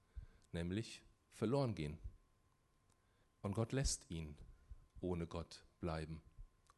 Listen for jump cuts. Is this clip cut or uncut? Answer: cut